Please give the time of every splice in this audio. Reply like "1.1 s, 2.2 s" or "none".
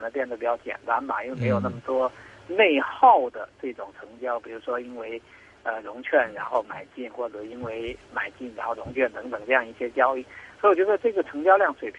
none